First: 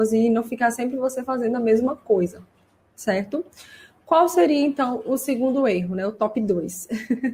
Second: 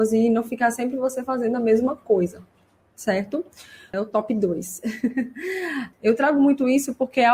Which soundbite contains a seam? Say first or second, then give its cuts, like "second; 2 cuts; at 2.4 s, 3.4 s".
second; 2 cuts; at 3.9 s, 5.9 s